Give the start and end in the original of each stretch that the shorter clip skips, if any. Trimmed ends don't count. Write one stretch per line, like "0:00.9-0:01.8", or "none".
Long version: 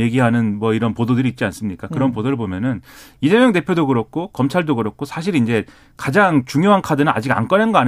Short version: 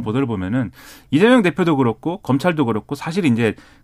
none